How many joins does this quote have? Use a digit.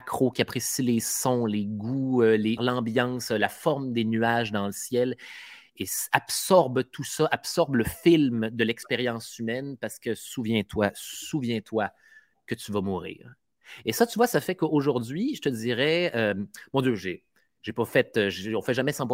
1